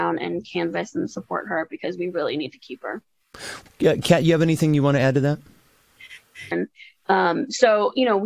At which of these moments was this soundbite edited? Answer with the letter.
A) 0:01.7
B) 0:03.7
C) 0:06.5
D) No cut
C